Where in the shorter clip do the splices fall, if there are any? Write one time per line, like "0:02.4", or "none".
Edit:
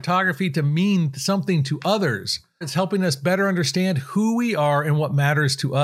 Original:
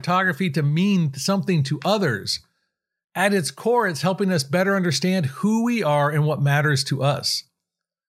0:02.6